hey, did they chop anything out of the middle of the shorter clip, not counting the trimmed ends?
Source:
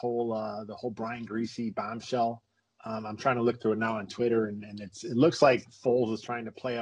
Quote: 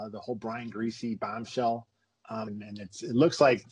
yes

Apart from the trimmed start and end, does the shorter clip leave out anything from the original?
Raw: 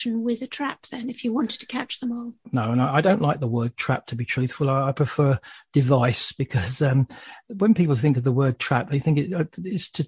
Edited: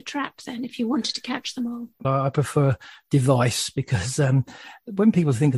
yes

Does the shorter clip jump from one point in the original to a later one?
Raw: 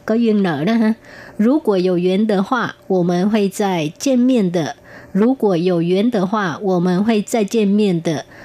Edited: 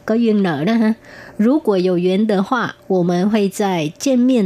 no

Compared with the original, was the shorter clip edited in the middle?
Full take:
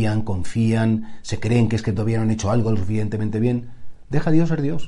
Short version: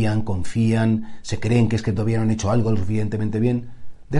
no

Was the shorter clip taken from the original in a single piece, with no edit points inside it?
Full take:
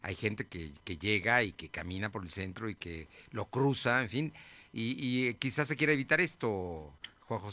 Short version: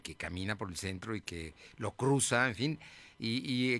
yes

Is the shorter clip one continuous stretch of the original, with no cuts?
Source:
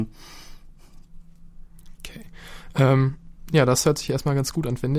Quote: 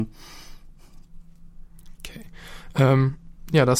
yes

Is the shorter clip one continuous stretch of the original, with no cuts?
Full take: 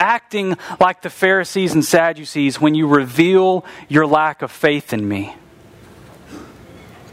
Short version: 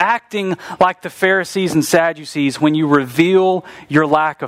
yes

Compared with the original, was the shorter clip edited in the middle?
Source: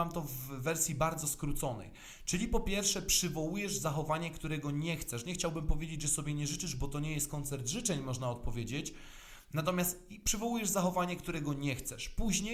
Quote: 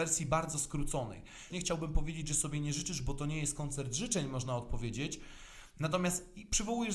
yes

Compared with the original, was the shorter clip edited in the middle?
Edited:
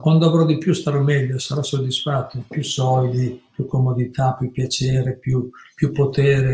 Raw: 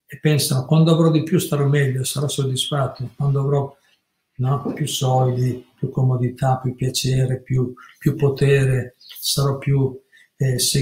yes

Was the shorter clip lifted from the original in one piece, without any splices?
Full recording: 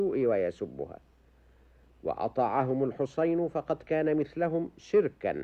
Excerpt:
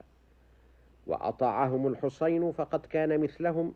yes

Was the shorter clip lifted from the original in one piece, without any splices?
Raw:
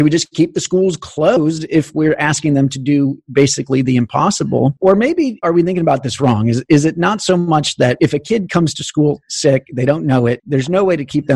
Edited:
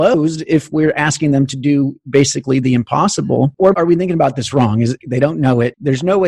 no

